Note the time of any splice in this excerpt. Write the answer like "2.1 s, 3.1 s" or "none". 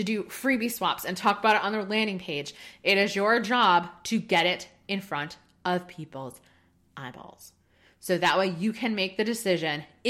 none